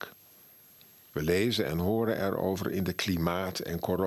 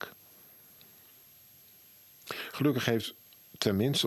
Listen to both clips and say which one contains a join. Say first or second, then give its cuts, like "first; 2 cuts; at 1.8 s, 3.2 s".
first; 1 cut; at 1.1 s